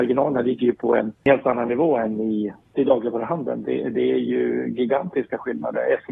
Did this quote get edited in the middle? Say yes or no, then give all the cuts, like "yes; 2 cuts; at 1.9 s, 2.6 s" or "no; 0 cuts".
no; 0 cuts